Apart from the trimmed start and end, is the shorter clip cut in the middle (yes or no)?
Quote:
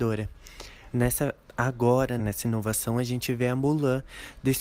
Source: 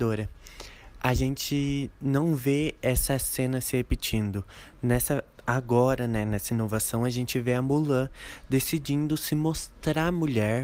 yes